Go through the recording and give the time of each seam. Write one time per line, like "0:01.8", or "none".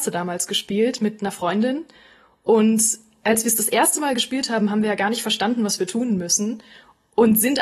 none

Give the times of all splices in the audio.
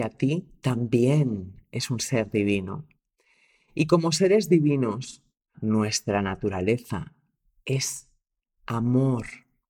0:05.5

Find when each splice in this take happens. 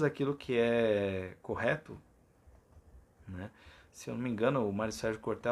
none

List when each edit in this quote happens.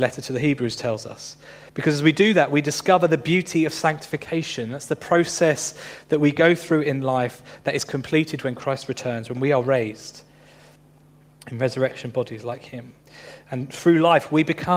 none

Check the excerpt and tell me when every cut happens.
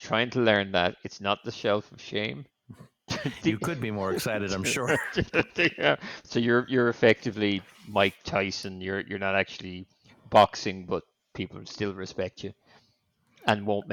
0:02.5

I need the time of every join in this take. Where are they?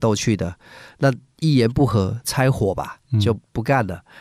0:02.2

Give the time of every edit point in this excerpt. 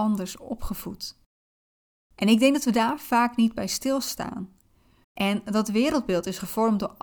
0:05.0

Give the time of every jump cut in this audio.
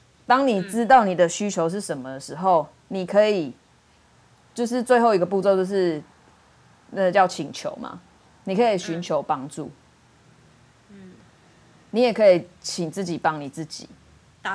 none

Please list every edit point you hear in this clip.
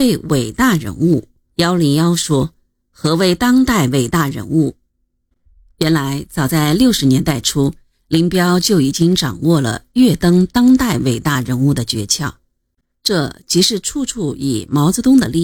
0:01.4
0:04.9

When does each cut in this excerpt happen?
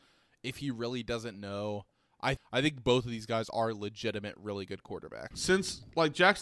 0:02.4
0:05.3

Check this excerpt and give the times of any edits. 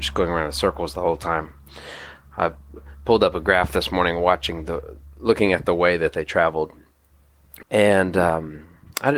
0:07.6

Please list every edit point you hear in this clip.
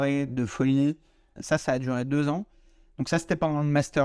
0:01.4

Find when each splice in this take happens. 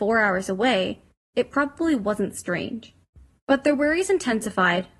0:01.3
0:03.4

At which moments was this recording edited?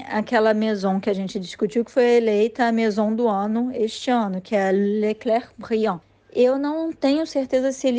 none

